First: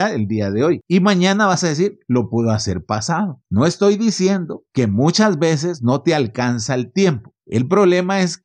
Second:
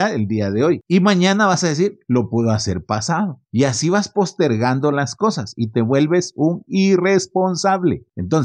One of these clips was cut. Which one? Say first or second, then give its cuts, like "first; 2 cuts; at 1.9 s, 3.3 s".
first; 2 cuts; at 3.4 s, 7.4 s